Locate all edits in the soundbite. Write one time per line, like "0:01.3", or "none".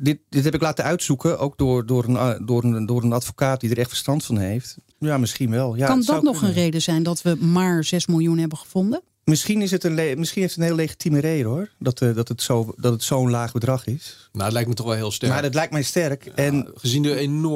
0:04.9